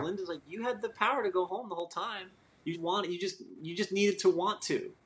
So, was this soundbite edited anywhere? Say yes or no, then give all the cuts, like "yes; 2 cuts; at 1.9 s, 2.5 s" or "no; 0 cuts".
yes; 1 cut; at 2.7 s